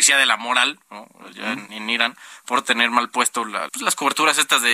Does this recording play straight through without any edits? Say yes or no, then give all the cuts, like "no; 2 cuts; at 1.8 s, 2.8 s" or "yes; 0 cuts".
no; 2 cuts; at 1.7 s, 3.7 s